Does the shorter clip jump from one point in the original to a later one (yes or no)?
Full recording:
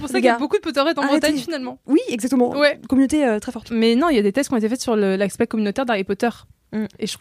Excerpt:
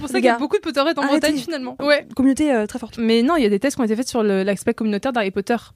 yes